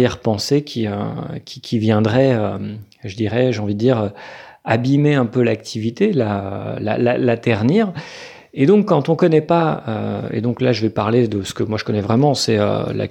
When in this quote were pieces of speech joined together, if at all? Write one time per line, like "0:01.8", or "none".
none